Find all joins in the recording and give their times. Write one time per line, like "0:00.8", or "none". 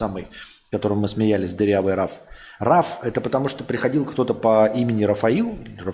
none